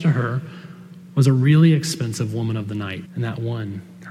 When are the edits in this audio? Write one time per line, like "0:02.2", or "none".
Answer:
0:03.0